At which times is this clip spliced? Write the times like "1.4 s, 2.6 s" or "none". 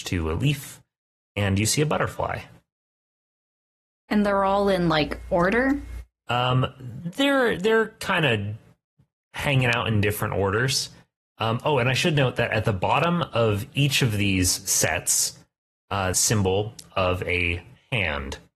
16.1 s